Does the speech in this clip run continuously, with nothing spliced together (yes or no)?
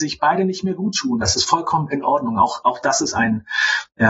no